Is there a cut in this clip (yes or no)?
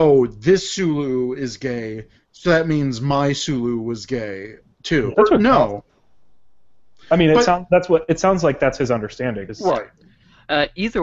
yes